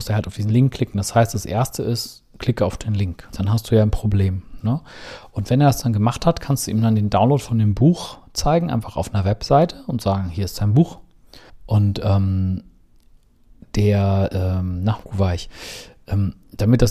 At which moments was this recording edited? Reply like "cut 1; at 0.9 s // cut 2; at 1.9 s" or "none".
cut 1; at 3.3 s // cut 2; at 4.6 s // cut 3; at 11.5 s